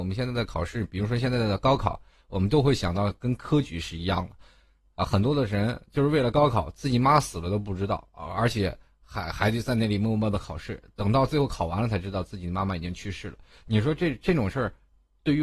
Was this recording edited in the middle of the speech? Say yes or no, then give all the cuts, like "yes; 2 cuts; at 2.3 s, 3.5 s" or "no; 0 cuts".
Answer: no; 0 cuts